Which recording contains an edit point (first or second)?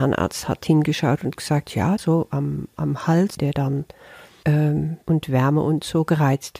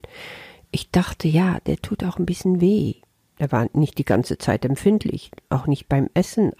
first